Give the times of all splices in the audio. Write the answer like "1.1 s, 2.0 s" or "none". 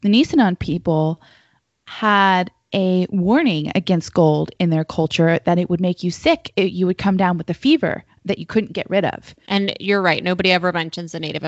9.5 s

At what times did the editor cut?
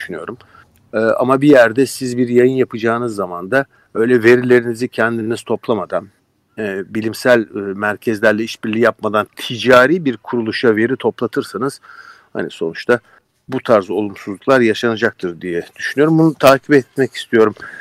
none

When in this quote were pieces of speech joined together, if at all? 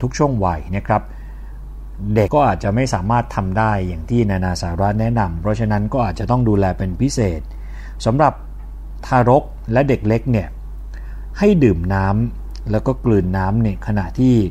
2.3 s

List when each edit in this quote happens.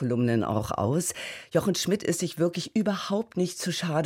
none

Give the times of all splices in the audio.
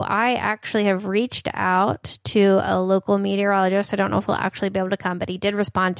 none

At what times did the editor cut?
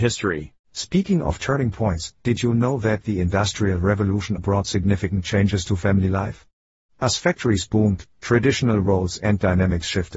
4.4 s

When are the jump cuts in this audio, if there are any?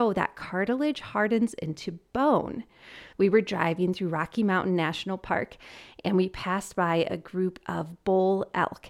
3.1 s

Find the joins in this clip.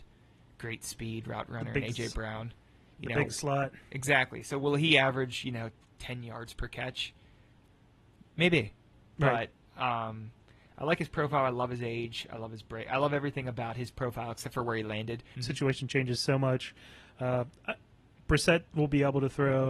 15.4 s

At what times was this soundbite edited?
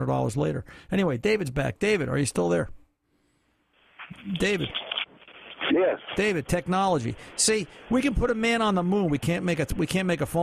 none

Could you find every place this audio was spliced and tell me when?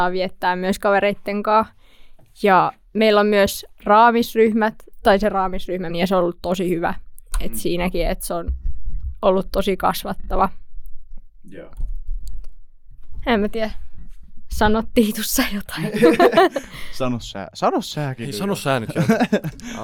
5.9 s

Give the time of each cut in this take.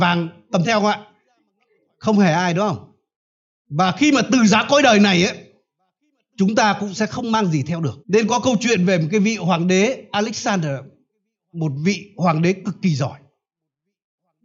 8.0 s, 11.5 s

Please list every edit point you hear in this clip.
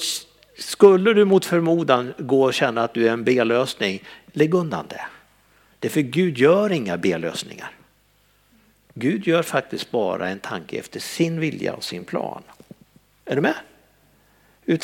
13.2 s

